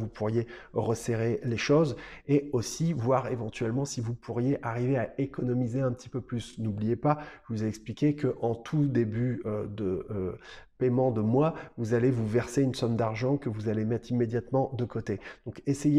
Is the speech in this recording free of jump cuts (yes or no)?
yes